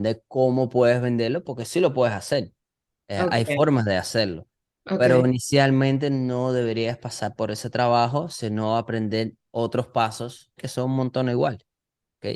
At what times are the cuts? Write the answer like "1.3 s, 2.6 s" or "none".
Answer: 9.4 s, 10.6 s